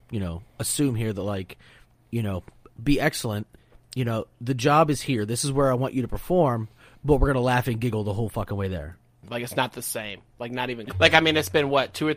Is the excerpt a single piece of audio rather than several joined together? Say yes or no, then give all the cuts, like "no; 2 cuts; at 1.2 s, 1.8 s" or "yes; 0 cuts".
no; 2 cuts; at 9.2 s, 10.9 s